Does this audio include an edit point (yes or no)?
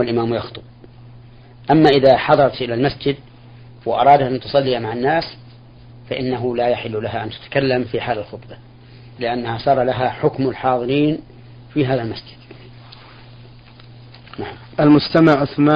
yes